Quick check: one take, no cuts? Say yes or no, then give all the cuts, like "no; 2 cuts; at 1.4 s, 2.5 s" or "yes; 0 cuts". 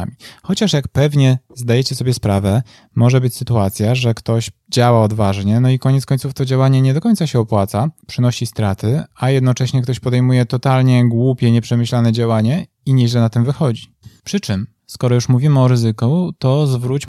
no; 1 cut; at 14.2 s